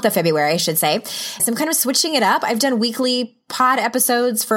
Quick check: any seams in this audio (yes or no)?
yes